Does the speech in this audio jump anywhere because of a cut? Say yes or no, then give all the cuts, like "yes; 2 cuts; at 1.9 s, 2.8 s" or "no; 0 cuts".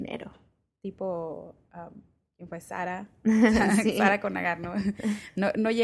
no; 0 cuts